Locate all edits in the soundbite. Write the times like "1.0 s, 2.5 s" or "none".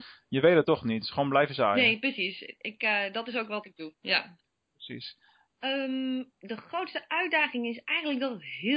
3.9 s, 5.5 s